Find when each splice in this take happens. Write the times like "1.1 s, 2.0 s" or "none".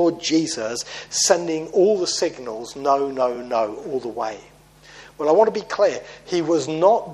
none